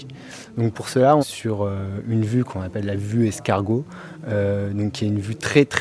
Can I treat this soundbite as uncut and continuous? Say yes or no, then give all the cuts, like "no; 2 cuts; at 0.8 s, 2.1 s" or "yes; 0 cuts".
no; 1 cut; at 1.2 s